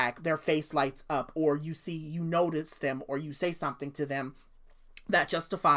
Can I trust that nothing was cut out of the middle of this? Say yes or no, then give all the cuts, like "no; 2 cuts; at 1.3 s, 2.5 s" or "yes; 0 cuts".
yes; 0 cuts